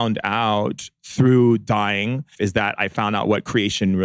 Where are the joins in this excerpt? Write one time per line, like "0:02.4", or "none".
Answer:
0:02.3